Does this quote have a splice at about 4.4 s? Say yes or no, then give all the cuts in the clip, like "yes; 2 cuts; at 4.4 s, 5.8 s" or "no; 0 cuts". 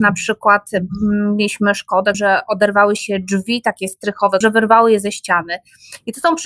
yes; 2 cuts; at 2.1 s, 4.4 s